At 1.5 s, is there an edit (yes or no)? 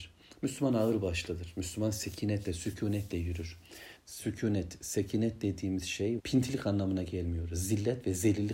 no